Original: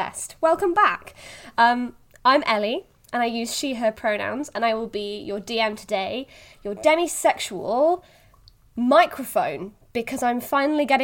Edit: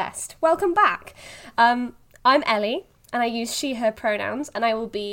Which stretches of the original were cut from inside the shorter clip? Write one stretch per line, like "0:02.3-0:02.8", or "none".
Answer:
none